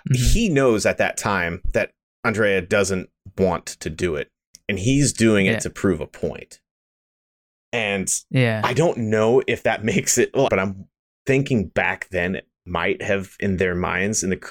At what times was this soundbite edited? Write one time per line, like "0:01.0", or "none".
0:10.5